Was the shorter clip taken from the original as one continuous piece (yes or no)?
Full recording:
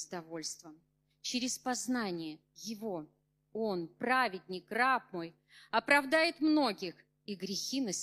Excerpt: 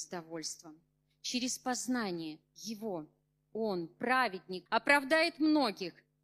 no